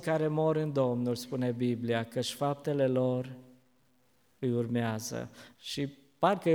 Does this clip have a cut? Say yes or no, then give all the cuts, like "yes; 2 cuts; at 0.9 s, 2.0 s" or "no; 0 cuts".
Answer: yes; 1 cut; at 5.5 s